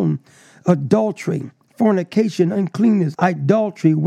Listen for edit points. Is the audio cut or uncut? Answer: cut